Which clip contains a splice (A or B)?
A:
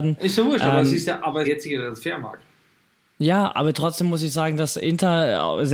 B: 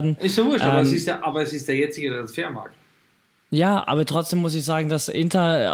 A